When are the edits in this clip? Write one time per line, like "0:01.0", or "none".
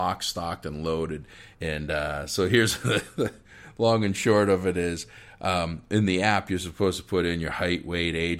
0:01.5